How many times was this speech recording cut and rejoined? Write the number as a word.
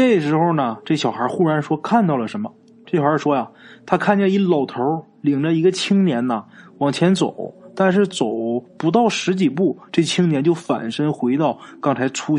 one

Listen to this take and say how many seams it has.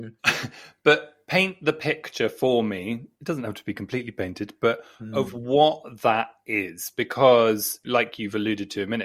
one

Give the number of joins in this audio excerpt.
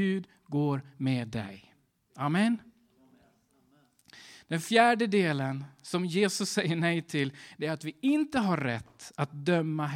zero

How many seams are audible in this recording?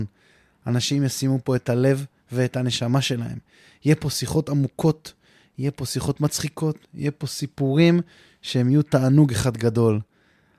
zero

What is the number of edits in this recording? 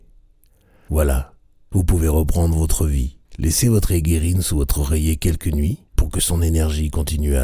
two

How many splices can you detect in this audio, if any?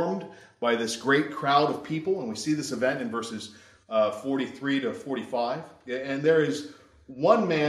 zero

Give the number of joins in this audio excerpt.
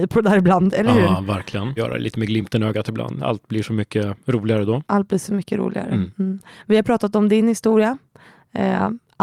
one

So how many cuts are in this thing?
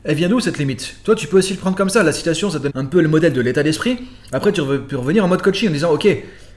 one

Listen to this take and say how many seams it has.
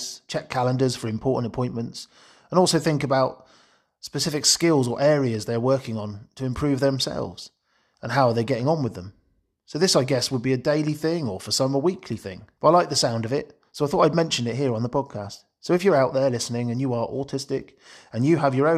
one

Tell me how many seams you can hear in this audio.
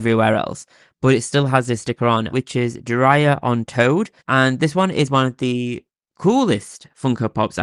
two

